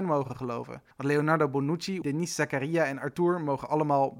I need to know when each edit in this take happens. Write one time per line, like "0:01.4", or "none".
0:00.9
0:02.0